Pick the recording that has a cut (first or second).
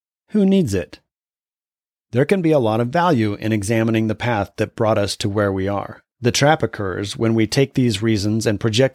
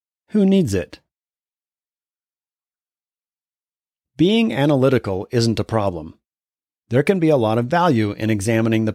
first